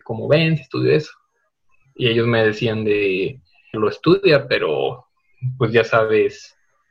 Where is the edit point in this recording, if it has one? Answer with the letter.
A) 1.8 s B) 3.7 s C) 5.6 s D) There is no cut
B